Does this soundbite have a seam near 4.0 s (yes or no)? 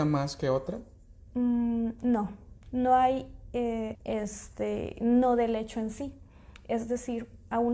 yes